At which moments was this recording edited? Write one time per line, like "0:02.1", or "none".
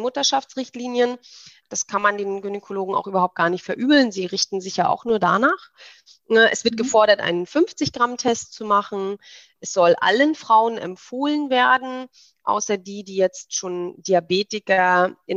none